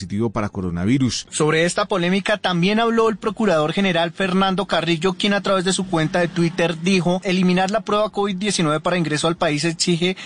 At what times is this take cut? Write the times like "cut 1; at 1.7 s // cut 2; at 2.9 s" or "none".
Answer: cut 1; at 1.3 s // cut 2; at 7.2 s